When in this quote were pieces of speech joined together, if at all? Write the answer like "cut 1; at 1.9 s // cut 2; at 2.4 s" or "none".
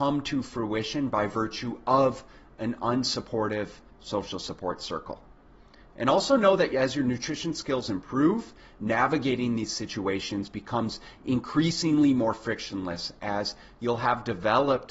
none

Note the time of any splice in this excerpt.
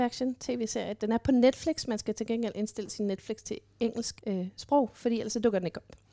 cut 1; at 4.2 s

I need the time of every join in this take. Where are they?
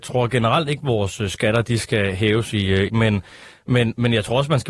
cut 1; at 2.9 s

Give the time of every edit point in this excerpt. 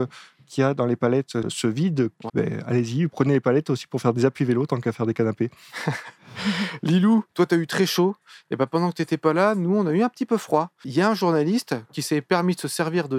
cut 1; at 2.3 s

